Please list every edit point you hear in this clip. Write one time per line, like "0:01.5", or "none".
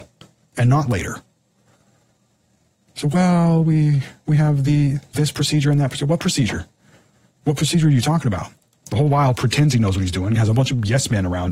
0:08.8